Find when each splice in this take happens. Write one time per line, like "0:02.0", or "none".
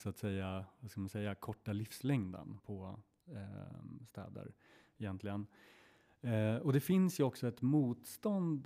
0:02.6

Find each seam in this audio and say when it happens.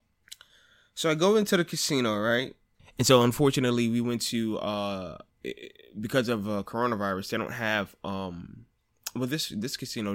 0:02.8

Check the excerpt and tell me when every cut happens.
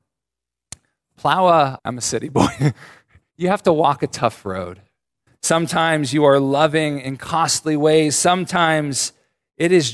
0:01.8
0:05.3

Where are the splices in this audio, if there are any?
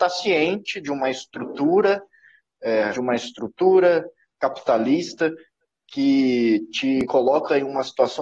0:02.9

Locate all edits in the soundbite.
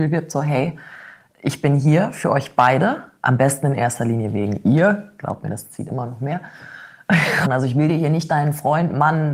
0:07.4

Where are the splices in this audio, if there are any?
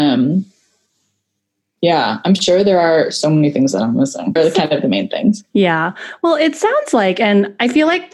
0:04.4

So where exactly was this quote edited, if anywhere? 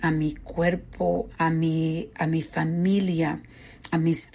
0:01.3

